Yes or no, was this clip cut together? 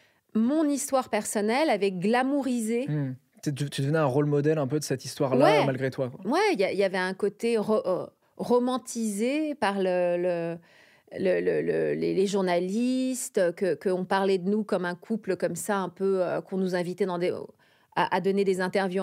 no